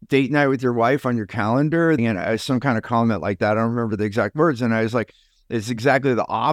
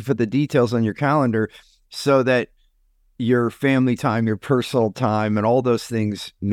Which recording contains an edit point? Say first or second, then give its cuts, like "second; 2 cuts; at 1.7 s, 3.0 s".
first; 1 cut; at 2.0 s